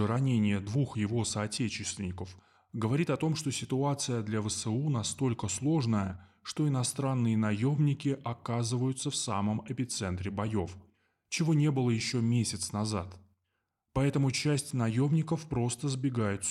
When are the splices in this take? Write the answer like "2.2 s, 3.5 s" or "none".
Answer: none